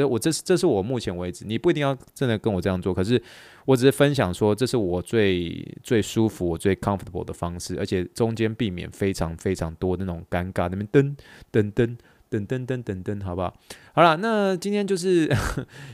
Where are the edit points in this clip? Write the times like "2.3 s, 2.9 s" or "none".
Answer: 12.5 s